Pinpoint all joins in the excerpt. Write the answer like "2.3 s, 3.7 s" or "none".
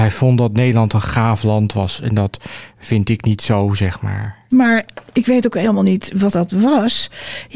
4.5 s